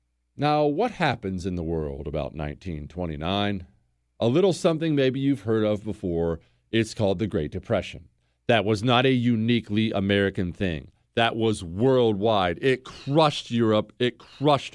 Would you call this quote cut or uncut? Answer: uncut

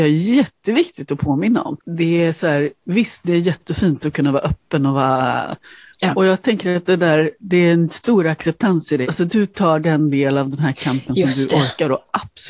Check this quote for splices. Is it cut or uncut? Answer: cut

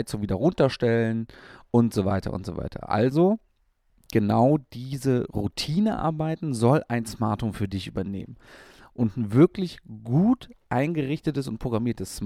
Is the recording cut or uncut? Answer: uncut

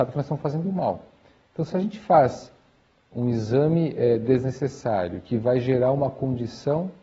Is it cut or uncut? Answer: uncut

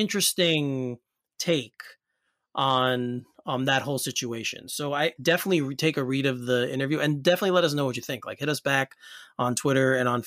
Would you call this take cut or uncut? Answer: cut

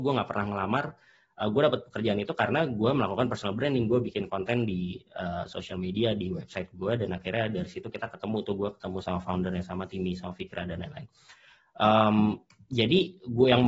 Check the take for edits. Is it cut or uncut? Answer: uncut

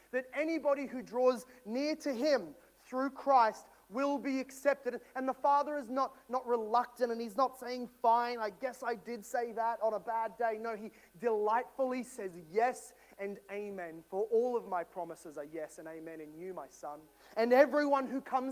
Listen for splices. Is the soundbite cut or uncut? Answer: uncut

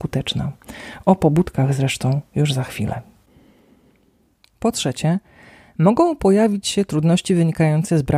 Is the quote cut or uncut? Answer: uncut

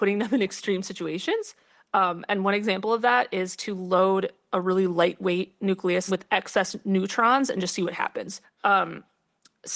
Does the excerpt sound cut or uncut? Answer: cut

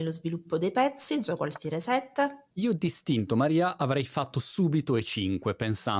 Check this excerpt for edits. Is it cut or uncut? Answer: cut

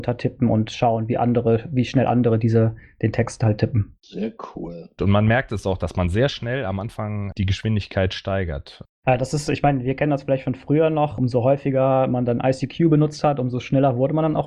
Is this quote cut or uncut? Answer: cut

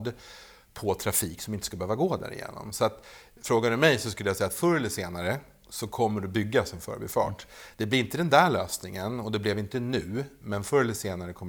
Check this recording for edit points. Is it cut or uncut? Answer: uncut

